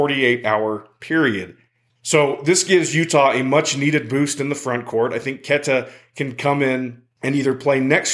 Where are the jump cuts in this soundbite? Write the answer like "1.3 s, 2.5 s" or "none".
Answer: 1.9 s